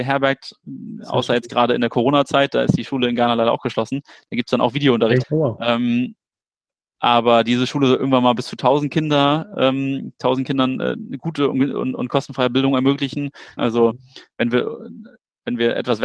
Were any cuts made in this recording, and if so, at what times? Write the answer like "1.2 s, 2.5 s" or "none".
5.2 s, 13.6 s